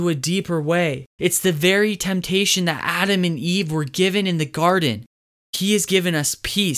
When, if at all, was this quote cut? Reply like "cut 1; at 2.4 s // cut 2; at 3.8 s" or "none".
cut 1; at 1.2 s // cut 2; at 5.4 s

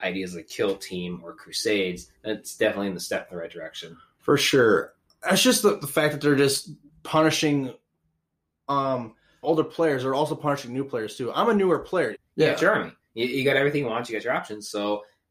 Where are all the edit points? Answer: cut 1; at 9.4 s // cut 2; at 12.1 s

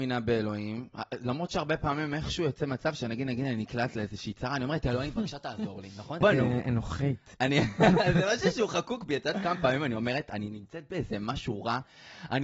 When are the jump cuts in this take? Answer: cut 1; at 6.2 s

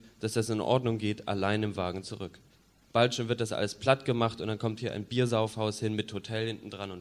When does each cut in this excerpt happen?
cut 1; at 2.8 s

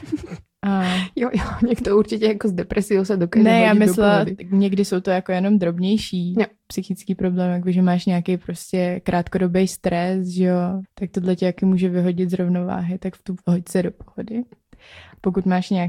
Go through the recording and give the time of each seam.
cut 1; at 10.8 s // cut 2; at 13.4 s

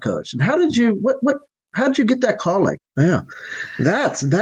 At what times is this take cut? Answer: cut 1; at 2.8 s

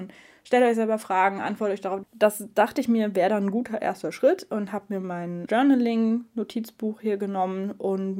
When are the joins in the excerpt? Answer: cut 1; at 2.0 s // cut 2; at 5.5 s

